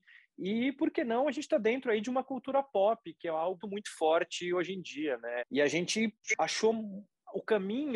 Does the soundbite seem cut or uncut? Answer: cut